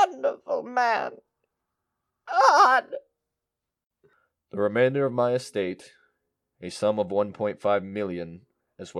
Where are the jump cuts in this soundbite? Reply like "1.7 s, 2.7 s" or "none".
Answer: none